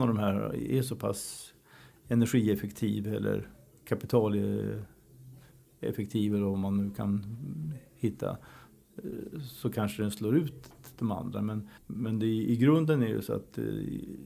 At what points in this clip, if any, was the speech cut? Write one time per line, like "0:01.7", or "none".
0:11.8